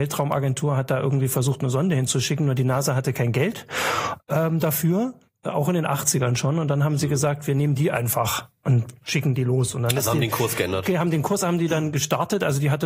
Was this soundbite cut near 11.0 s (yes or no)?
no